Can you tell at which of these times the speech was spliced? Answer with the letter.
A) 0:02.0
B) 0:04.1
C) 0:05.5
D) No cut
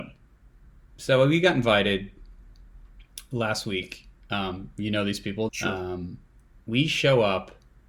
C